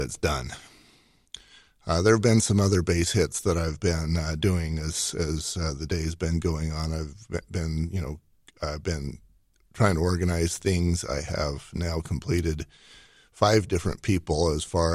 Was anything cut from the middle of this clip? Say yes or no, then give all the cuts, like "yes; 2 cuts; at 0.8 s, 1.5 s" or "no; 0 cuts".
no; 0 cuts